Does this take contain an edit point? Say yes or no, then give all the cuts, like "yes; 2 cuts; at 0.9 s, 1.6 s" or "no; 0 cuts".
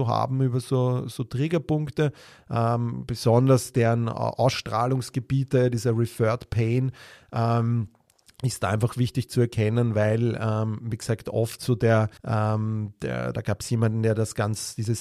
yes; 1 cut; at 12.2 s